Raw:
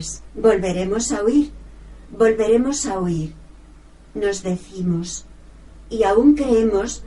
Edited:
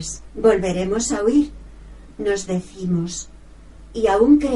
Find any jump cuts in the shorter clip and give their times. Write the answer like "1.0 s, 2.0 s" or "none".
2.1 s